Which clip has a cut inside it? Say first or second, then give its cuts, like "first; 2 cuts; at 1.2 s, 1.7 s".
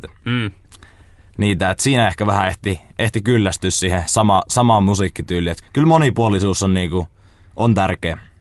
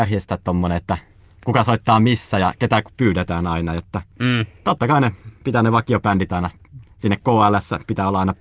first; 1 cut; at 5.6 s